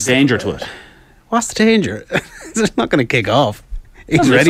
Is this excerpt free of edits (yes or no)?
yes